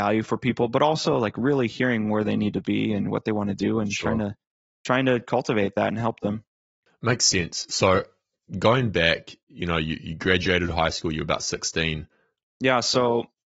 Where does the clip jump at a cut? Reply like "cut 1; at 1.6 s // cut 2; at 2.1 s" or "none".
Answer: cut 1; at 12.5 s